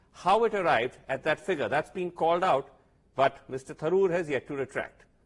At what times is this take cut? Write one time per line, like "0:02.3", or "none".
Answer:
none